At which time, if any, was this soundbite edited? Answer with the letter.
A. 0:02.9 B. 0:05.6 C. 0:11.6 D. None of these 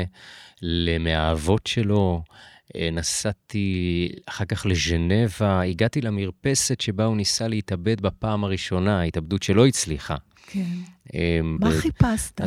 C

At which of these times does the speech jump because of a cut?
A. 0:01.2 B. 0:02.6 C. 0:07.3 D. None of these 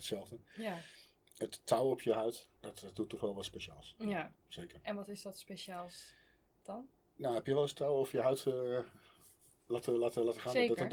B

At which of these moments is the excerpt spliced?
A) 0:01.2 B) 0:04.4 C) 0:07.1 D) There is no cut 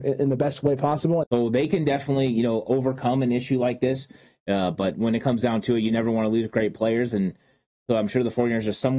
A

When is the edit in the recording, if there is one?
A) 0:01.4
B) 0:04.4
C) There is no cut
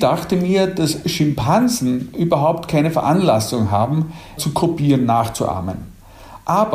B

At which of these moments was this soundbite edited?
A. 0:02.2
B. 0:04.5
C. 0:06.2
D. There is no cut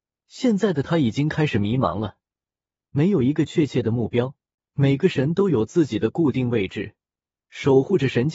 B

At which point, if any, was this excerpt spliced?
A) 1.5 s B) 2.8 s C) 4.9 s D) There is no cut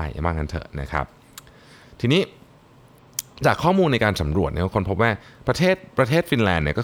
D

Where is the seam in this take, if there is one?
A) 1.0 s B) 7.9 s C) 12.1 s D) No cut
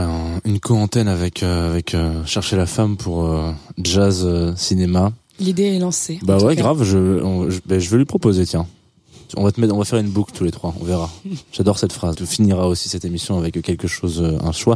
C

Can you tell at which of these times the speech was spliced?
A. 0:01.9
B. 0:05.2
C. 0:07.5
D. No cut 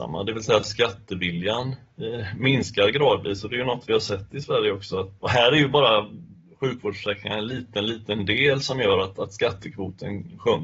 B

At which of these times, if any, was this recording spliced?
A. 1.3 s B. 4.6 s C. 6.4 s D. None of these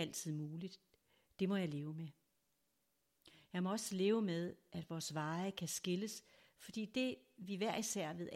D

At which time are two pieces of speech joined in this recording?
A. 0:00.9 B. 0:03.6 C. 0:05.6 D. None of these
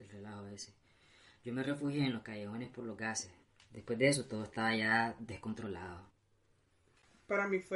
B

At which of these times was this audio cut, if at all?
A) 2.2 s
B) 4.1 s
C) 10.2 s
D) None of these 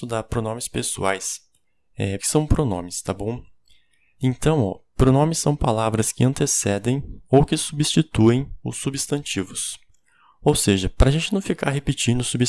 A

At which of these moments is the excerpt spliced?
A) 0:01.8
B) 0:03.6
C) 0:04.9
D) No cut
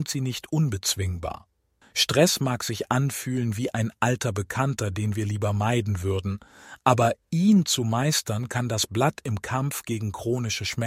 A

